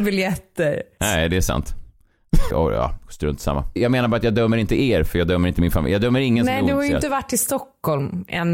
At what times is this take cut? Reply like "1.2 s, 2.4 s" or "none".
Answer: 1.0 s, 2.5 s